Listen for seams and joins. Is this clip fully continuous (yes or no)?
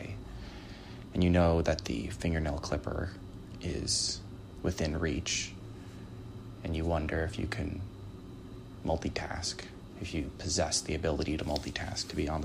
yes